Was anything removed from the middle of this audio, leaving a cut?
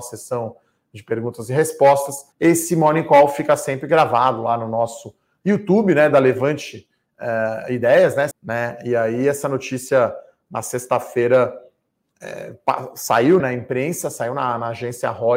yes; 3 cuts; at 2.3 s, 8.3 s, 13.4 s

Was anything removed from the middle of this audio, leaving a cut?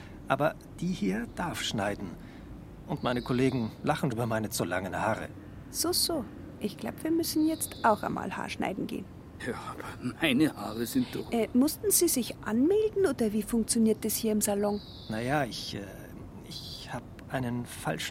yes; 2 cuts; at 4.1 s, 9.4 s

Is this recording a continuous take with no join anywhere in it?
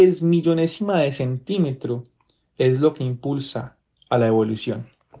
yes; 0 cuts

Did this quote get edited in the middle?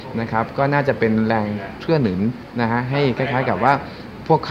no; 0 cuts

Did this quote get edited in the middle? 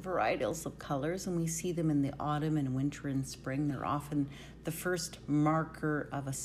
no; 0 cuts

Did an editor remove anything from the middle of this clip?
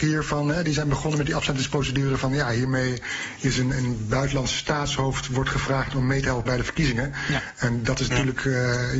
no; 0 cuts

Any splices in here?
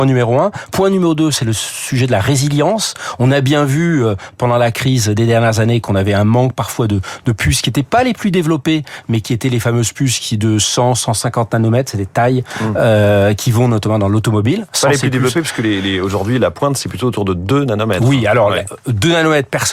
no; 0 cuts

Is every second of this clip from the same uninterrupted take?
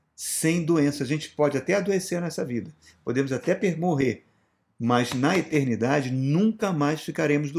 yes; 0 cuts

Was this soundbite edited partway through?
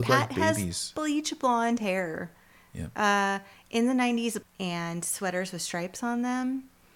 yes; 1 cut; at 4.4 s

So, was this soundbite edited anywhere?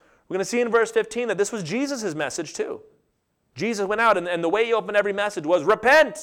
no; 0 cuts

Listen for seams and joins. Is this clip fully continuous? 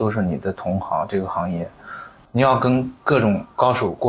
no; 1 cut; at 2.2 s

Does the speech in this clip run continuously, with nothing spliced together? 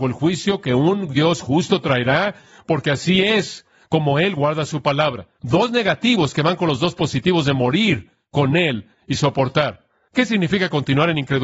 no; 1 cut; at 5.4 s

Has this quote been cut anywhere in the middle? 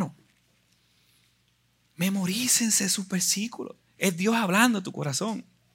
no; 0 cuts

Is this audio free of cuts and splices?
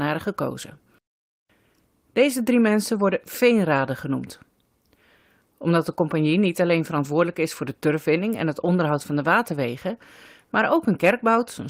yes; 0 cuts

